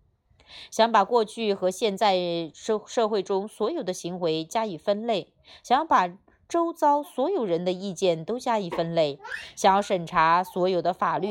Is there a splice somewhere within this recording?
no; 0 cuts

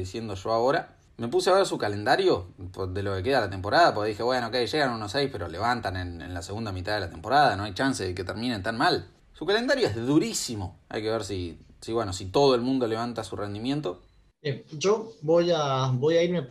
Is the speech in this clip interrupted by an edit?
yes; 2 cuts; at 10.8 s, 14.3 s

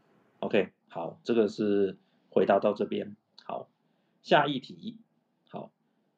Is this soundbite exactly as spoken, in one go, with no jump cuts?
yes; 0 cuts

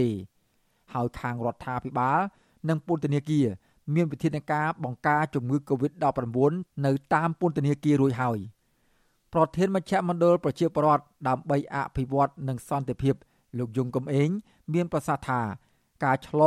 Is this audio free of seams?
yes; 0 cuts

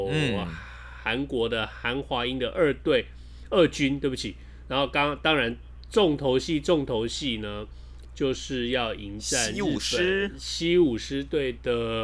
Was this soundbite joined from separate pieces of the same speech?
no; 0 cuts

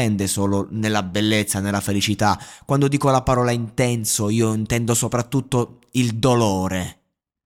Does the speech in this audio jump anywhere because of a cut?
no; 0 cuts

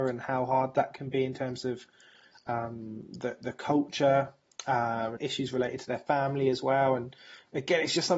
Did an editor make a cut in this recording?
yes; 1 cut; at 5.2 s

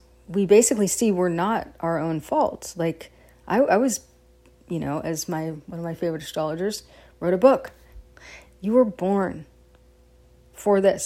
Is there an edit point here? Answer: yes; 1 cut; at 7.9 s

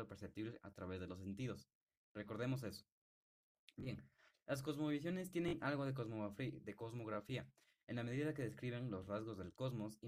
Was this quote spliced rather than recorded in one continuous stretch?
no; 0 cuts

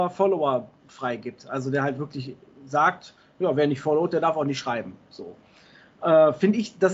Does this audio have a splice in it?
no; 0 cuts

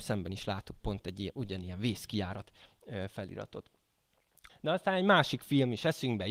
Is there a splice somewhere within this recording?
yes; 1 cut; at 4.5 s

